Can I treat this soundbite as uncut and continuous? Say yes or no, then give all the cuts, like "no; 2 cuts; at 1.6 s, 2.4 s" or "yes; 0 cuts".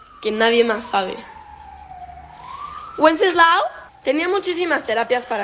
no; 1 cut; at 3.9 s